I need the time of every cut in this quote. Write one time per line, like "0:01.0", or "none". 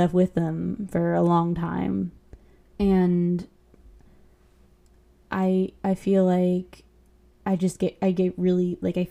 0:02.7

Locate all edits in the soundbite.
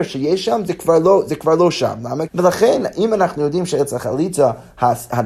0:02.3

